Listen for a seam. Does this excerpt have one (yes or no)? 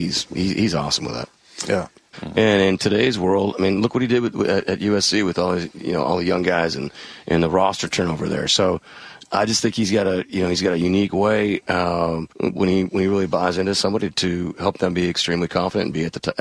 yes